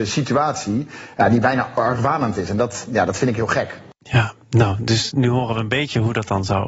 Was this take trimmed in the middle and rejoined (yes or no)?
no